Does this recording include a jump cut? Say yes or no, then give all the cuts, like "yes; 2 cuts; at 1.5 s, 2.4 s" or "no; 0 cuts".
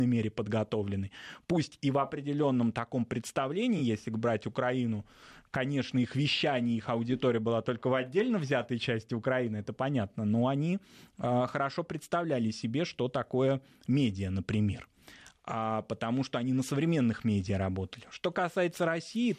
no; 0 cuts